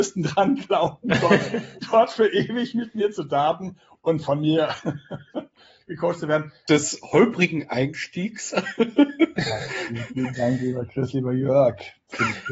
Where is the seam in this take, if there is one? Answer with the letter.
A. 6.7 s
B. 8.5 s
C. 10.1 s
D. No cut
A